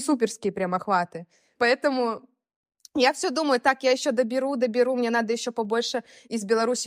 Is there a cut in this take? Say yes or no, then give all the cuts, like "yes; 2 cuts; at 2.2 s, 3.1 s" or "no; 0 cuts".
yes; 1 cut; at 1.5 s